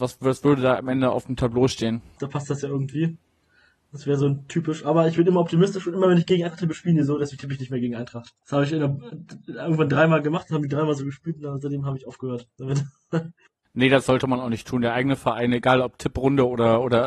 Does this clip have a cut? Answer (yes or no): yes